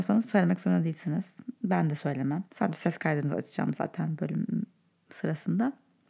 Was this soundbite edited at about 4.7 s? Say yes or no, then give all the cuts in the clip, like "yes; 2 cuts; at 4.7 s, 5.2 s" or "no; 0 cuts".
no; 1 cut; at 2.5 s